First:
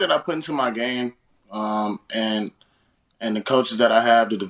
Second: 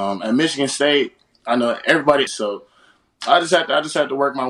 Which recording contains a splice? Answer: second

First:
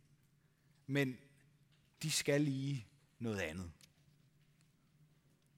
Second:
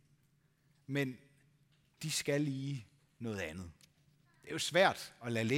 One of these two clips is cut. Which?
second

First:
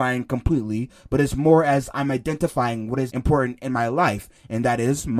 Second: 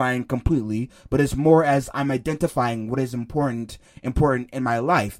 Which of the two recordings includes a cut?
first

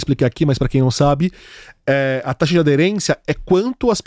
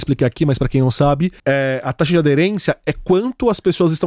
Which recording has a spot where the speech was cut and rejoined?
second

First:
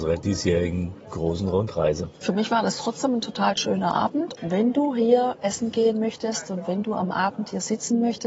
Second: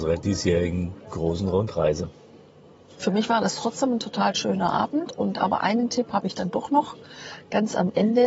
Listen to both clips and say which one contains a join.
first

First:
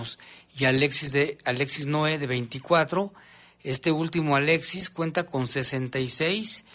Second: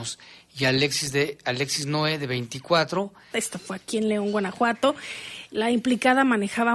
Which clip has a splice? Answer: second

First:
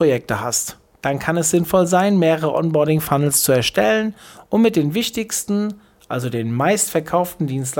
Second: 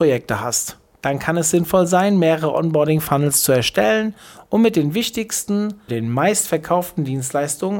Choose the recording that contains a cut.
second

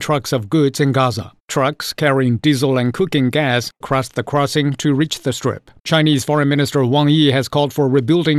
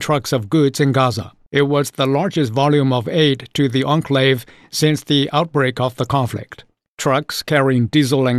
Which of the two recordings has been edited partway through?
first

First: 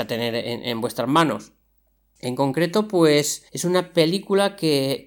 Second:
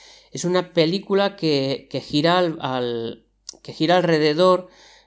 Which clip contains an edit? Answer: first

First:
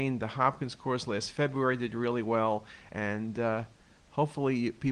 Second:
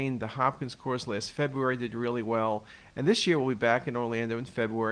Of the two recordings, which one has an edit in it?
first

